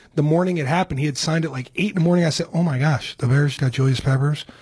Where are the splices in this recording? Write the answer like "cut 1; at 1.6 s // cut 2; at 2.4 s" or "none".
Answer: cut 1; at 3.6 s